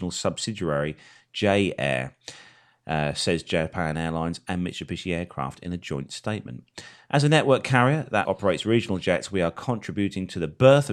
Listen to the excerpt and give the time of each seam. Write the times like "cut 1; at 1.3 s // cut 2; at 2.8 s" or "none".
cut 1; at 8.2 s